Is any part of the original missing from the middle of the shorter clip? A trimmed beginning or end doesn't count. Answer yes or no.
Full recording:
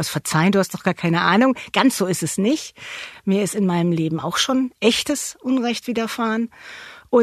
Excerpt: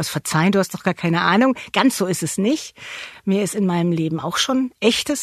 no